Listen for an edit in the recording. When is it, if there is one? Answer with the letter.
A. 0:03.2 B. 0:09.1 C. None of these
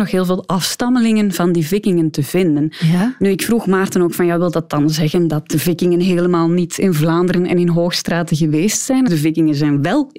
B